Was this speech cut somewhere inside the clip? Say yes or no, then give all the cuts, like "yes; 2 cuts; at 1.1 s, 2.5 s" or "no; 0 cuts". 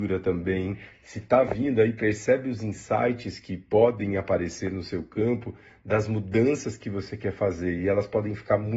no; 0 cuts